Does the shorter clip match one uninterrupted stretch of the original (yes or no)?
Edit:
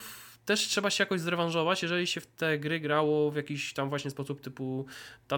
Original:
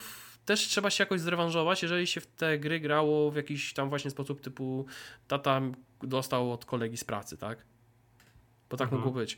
yes